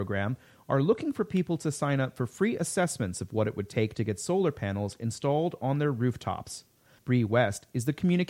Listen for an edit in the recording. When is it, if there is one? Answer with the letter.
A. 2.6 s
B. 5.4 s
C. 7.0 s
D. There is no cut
C